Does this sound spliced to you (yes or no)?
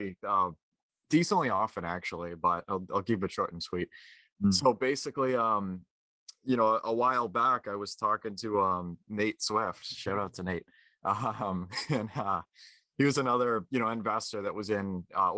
no